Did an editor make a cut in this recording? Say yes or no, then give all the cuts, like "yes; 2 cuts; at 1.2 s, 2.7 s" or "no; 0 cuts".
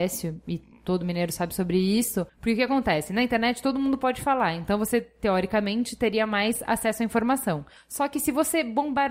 yes; 1 cut; at 2.3 s